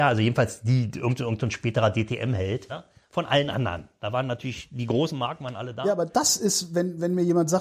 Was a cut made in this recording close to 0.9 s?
no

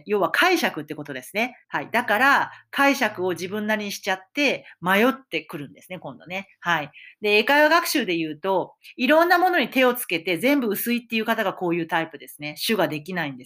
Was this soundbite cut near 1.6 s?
yes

